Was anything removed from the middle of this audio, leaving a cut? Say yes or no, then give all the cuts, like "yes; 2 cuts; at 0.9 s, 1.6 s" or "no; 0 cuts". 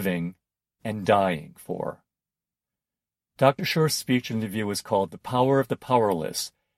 no; 0 cuts